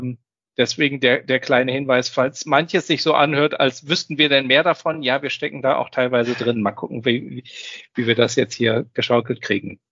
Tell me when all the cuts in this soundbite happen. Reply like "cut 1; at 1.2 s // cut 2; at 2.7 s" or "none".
none